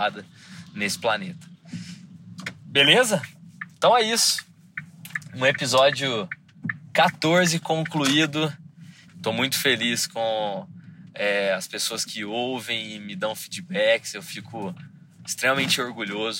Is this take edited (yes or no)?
yes